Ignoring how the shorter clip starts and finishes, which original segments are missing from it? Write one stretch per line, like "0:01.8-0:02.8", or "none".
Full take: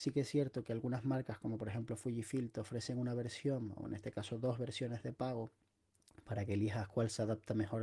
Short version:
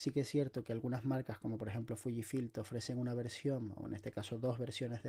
none